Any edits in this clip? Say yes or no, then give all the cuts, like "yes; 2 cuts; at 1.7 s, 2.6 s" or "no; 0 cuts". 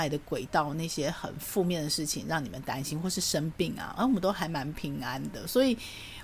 no; 0 cuts